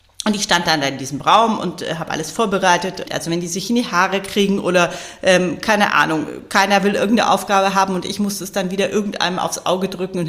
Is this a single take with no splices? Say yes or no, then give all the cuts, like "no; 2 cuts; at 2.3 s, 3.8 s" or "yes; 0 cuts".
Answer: no; 1 cut; at 3.1 s